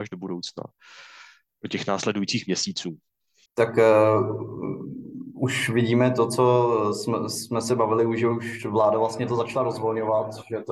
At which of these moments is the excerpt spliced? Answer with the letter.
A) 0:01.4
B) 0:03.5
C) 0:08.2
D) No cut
B